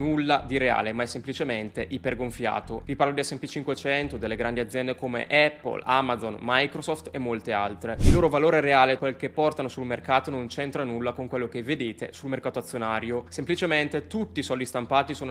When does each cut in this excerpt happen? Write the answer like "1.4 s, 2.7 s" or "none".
9.0 s